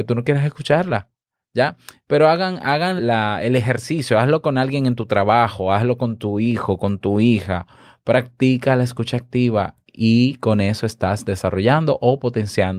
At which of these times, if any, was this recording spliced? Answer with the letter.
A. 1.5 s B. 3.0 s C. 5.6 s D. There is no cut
B